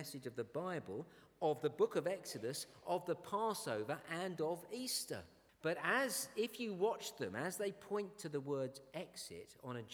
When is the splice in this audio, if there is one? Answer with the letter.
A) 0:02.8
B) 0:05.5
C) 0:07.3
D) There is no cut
B